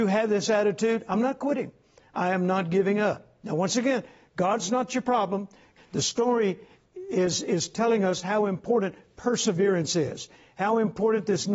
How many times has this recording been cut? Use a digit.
1